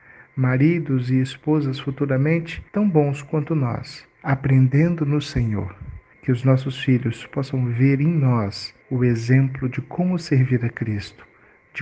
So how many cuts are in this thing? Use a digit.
3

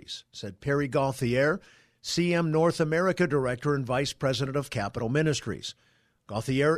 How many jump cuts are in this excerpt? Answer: 0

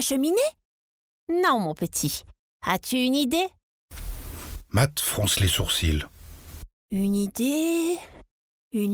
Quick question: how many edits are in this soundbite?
0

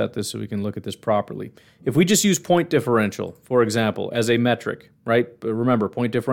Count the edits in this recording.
0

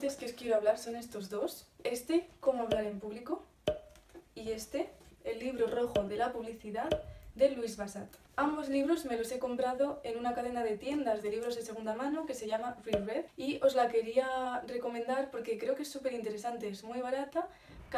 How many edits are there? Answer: 1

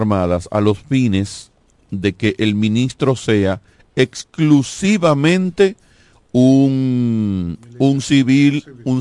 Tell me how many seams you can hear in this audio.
0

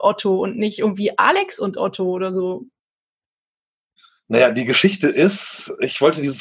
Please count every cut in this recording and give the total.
0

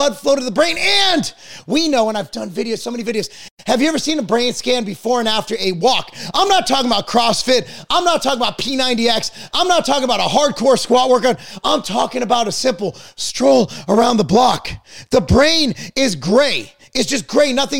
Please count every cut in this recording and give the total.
1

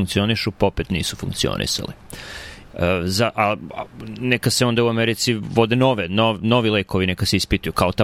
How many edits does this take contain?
1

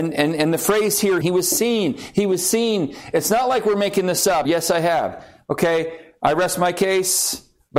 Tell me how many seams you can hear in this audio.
2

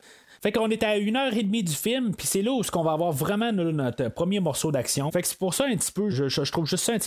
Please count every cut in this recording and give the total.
2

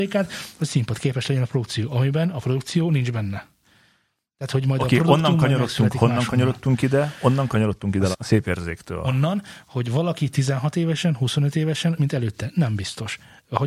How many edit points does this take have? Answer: 2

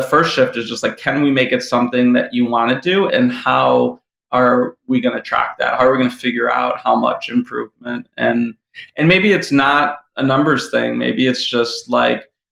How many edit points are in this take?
1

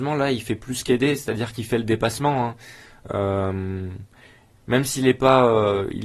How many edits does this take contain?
0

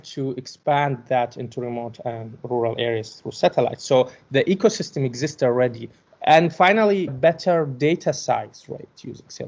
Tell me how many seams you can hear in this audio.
2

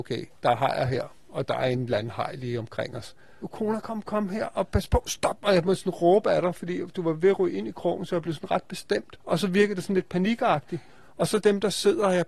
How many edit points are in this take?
1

